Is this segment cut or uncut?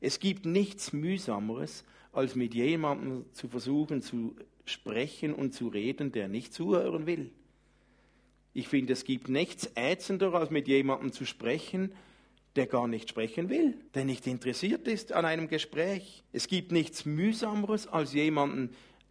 cut